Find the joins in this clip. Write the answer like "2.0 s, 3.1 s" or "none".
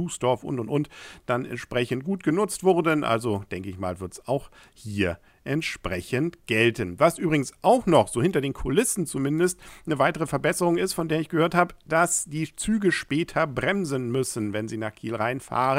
none